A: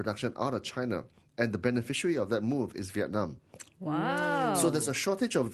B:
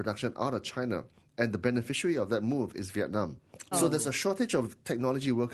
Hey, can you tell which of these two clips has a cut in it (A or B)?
B